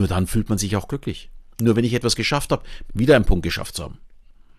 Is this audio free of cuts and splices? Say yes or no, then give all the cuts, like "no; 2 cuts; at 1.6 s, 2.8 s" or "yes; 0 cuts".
no; 1 cut; at 2.9 s